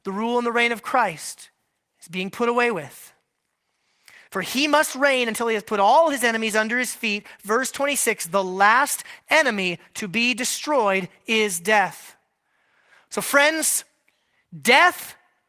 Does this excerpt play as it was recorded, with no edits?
yes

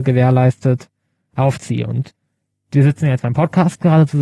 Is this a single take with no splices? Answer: yes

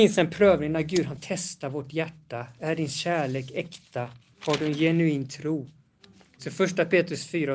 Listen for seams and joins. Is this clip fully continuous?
yes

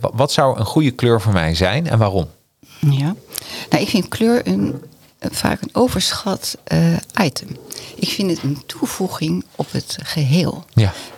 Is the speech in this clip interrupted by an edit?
no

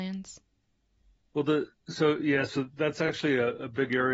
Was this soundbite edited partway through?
no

